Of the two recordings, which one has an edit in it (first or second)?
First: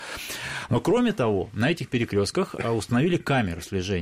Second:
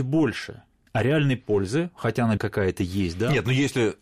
second